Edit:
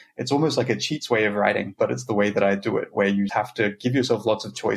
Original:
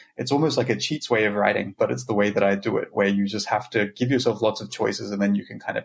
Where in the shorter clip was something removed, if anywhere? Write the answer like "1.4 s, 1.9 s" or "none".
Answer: 3.3 s